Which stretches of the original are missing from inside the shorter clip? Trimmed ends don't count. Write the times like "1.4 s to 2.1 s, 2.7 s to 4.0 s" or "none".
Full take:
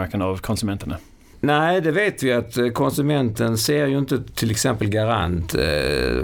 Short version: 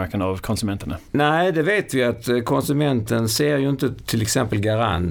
1.1 s to 1.4 s